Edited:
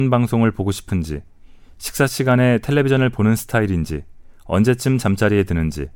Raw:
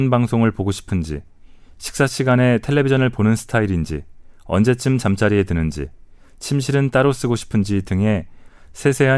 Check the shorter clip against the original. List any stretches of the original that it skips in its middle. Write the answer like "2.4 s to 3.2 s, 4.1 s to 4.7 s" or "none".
none